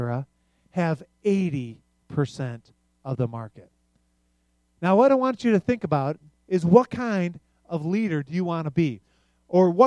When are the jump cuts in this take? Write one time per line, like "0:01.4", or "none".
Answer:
none